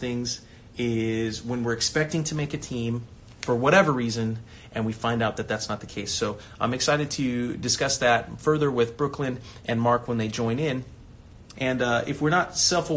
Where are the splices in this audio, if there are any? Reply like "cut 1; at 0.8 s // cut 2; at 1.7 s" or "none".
cut 1; at 11.5 s